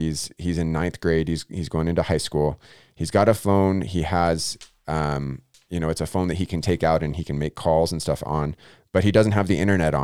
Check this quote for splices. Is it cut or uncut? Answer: uncut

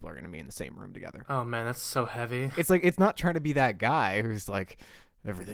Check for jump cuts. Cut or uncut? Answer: uncut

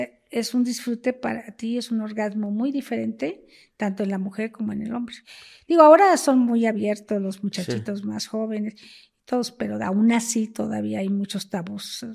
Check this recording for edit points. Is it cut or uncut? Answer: uncut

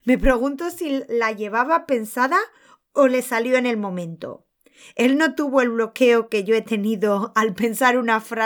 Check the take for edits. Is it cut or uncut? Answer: uncut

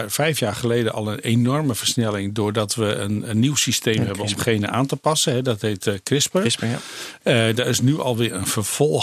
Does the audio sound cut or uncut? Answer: uncut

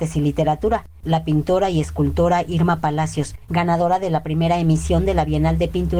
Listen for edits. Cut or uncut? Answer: uncut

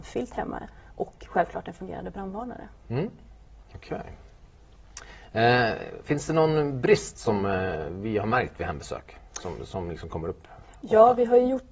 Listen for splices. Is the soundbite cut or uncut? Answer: uncut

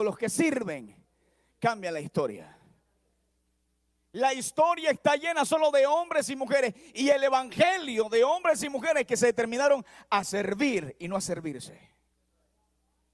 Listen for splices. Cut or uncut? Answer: uncut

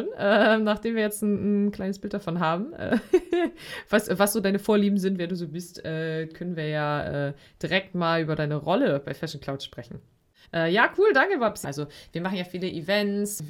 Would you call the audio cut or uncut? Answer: cut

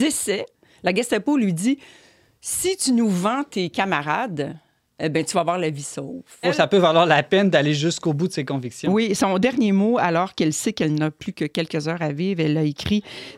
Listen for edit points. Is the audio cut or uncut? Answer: cut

